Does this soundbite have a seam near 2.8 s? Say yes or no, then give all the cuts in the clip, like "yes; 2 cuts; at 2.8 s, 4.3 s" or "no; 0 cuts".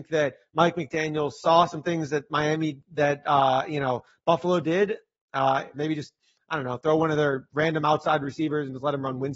no; 1 cut; at 5.7 s